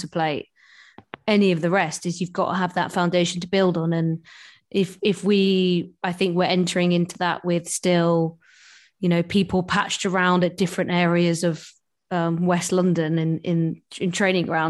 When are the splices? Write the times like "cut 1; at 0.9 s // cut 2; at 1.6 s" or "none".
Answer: none